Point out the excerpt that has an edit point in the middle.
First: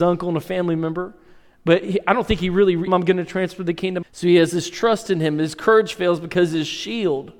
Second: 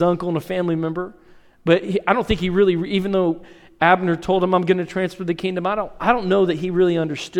first; 2 cuts; at 2.9 s, 4.0 s

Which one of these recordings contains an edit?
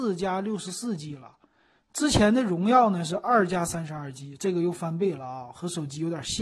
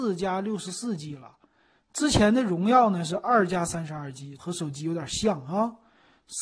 second; 1 cut; at 4.4 s

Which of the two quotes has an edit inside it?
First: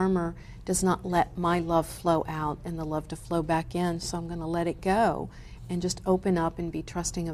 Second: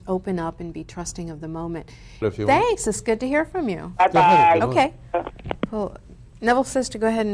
second; 1 cut; at 2.2 s

